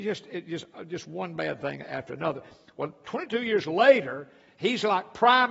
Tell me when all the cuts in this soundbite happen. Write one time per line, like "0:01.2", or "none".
none